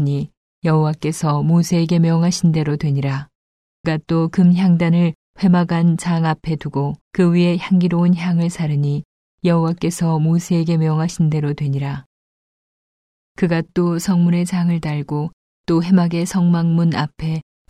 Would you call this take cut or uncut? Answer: cut